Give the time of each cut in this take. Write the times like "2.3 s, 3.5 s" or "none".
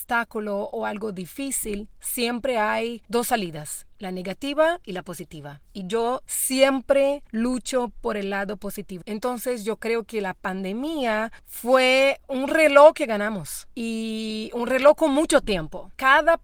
9.0 s